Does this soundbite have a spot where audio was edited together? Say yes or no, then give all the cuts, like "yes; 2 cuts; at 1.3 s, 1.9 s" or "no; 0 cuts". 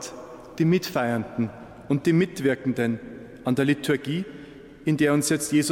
no; 0 cuts